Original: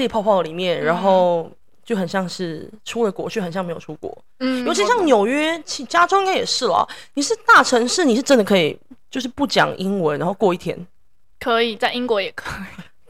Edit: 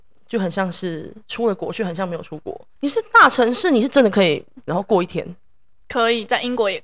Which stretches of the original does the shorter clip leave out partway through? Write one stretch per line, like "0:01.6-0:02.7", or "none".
0:04.3-0:07.1
0:09.0-0:10.2